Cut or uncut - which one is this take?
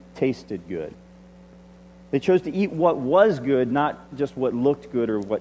uncut